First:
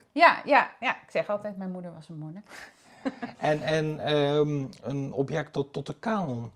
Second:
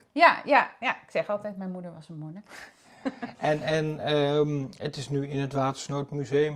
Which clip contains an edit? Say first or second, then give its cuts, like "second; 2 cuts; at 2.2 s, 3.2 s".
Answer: first; 1 cut; at 4.8 s